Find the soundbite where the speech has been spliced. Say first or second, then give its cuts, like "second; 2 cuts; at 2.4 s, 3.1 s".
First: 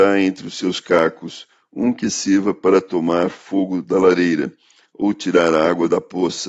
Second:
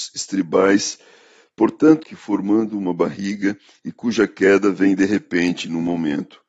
second; 2 cuts; at 2.0 s, 3.8 s